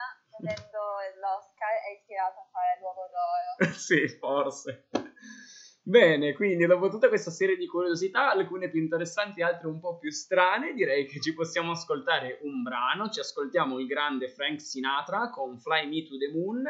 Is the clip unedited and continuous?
yes; 0 cuts

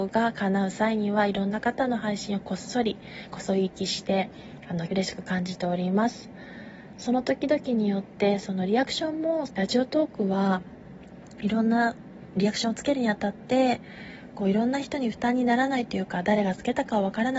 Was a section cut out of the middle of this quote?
yes; 3 cuts; at 4.9 s, 8.4 s, 9.5 s

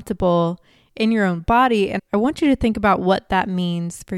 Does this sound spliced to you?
yes; 1 cut; at 2.0 s

